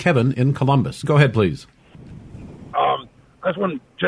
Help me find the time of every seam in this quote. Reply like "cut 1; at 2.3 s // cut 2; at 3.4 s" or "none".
cut 1; at 1.0 s // cut 2; at 2.7 s